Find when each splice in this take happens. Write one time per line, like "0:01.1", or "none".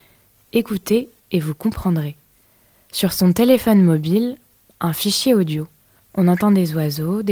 none